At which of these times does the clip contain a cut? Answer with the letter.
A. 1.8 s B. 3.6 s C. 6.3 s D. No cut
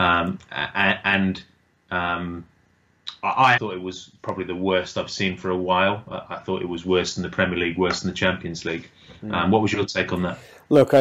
B